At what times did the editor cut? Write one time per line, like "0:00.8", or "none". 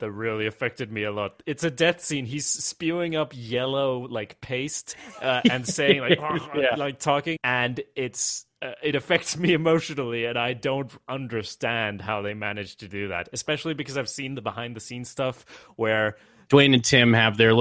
0:07.4
0:16.5